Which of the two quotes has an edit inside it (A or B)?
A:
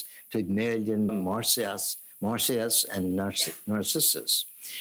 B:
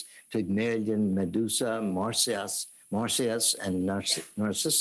A